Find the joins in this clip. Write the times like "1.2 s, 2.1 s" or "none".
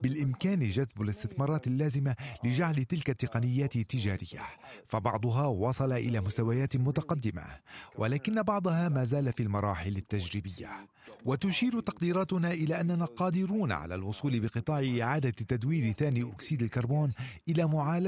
none